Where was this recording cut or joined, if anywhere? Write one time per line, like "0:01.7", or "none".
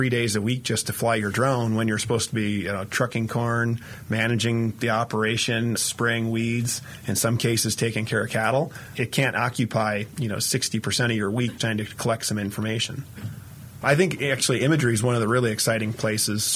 0:05.8
0:11.6
0:13.8